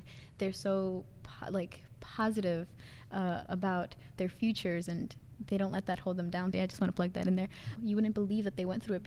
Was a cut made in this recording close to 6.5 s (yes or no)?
yes